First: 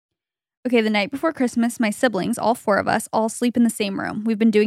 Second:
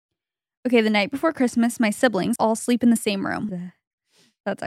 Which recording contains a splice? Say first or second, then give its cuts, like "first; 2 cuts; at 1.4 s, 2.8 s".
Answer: second; 2 cuts; at 2.4 s, 3.5 s